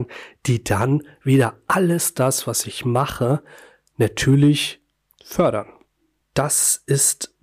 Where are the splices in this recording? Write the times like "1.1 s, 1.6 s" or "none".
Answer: none